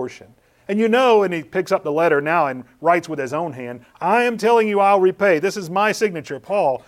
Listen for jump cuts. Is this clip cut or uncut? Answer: uncut